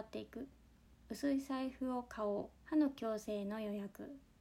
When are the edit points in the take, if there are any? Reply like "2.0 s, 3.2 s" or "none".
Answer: 2.6 s